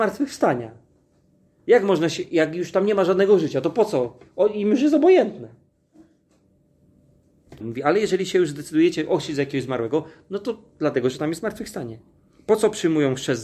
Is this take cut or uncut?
cut